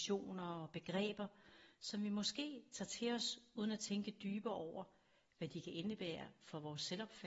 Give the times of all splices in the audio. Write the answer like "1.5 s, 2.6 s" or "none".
none